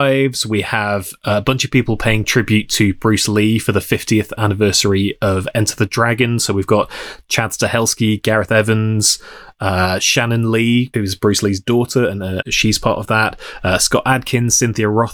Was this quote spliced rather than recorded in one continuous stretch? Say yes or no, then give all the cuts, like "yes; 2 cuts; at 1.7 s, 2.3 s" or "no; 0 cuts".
yes; 2 cuts; at 10.9 s, 12.4 s